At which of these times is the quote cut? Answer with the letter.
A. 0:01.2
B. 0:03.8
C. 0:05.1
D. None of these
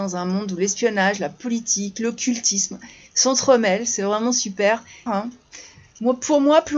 C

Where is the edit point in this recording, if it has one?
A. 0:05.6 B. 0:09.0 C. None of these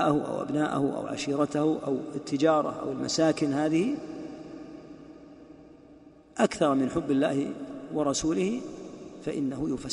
C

